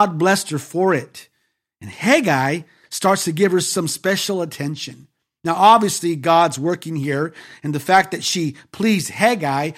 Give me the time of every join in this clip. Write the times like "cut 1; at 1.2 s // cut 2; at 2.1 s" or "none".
none